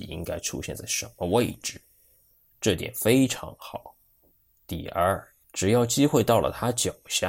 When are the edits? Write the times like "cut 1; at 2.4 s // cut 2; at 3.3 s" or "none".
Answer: cut 1; at 5.4 s